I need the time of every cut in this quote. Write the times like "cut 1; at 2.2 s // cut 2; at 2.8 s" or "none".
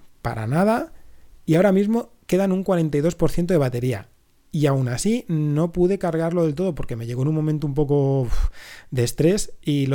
none

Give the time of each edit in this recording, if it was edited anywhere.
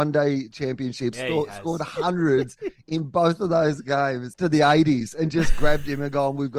cut 1; at 1.1 s // cut 2; at 4.3 s

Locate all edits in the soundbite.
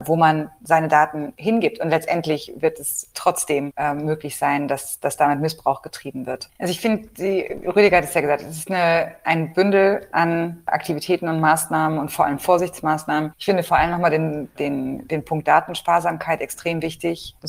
cut 1; at 6.5 s

